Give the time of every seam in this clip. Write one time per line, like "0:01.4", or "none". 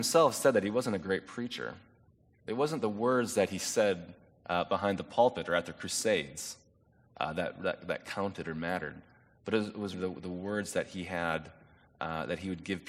0:09.9